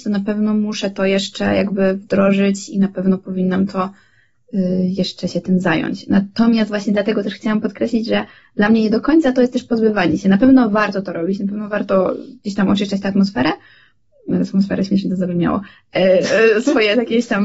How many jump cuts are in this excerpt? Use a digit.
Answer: 0